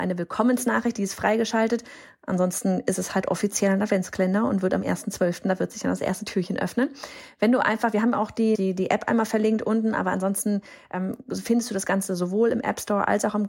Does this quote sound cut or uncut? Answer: cut